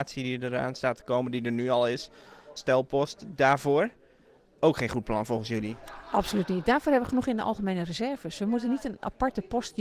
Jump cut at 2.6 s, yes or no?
yes